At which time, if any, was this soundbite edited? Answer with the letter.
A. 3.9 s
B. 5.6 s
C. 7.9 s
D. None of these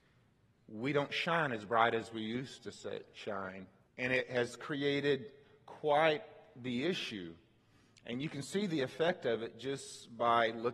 A